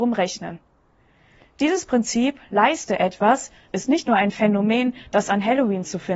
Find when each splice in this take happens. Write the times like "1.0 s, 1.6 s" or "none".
3.7 s